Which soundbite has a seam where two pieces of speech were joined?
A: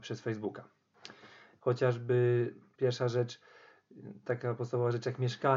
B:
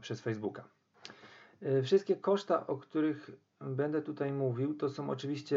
A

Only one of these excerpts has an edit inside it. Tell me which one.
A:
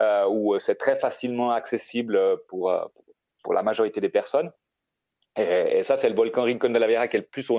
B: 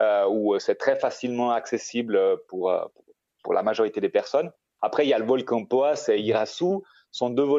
B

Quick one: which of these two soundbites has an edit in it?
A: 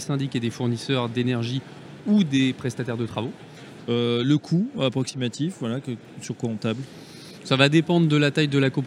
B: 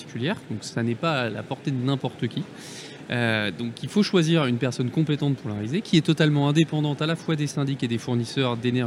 A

